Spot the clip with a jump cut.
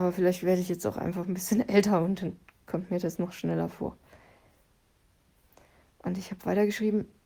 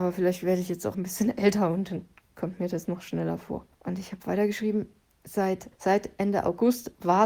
second; 3 cuts; at 0.9 s, 3.7 s, 5.7 s

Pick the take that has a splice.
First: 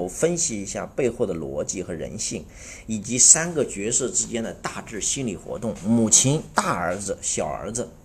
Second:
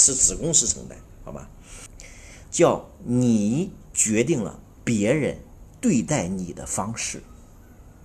second; 1 cut; at 2.5 s

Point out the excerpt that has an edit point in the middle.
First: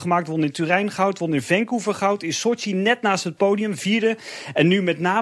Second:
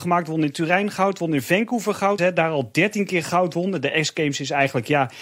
second; 1 cut; at 2.2 s

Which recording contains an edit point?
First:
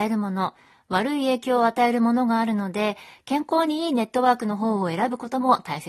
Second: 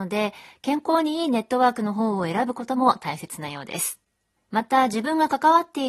second; 1 cut; at 4.4 s

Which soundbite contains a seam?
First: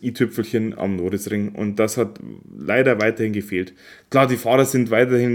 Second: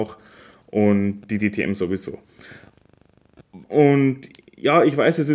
second; 1 cut; at 3.6 s

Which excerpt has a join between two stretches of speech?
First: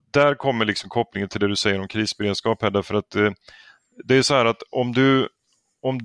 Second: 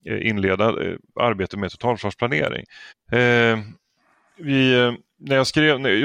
second; 1 cut; at 2.9 s

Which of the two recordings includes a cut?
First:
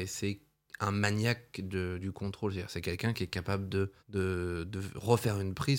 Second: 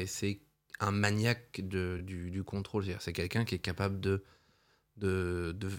first; 2 cuts; at 2.0 s, 4.0 s

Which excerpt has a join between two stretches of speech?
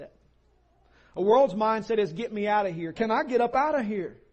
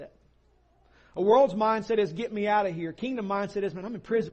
first; 1 cut; at 2.9 s

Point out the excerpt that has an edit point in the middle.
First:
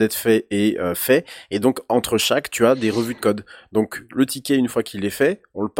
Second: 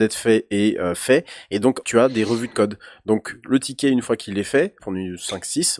second; 2 cuts; at 1.8 s, 4.8 s

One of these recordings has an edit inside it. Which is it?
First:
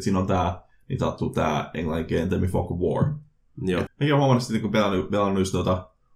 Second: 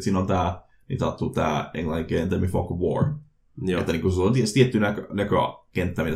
first; 1 cut; at 3.9 s

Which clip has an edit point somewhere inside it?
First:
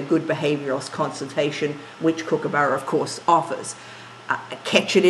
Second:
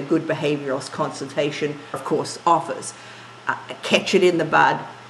second; 1 cut; at 1.9 s

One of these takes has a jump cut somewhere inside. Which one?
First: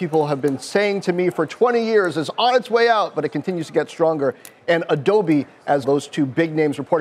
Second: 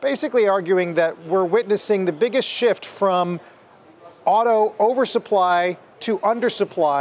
first; 1 cut; at 5.8 s

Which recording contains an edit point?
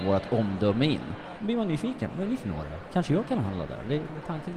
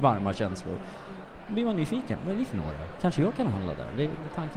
first; 1 cut; at 1.4 s

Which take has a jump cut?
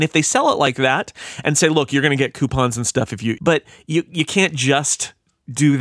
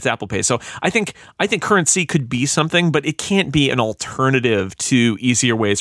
first; 1 cut; at 3.4 s

